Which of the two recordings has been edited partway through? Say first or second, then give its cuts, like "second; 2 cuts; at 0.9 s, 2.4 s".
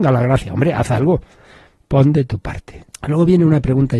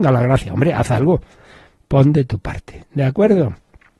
first; 1 cut; at 2.9 s